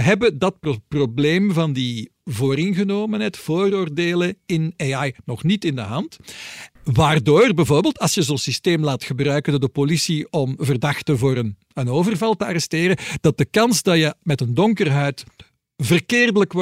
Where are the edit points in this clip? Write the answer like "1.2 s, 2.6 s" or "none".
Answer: 6.8 s